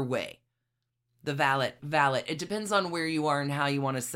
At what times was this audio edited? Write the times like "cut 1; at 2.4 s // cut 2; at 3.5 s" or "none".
cut 1; at 1.8 s